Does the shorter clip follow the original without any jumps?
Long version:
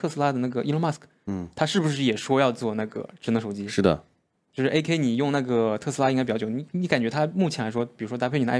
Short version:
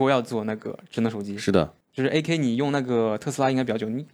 no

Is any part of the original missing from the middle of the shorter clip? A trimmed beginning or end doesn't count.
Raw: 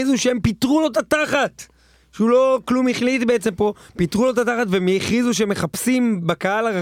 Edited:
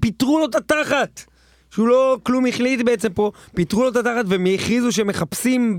no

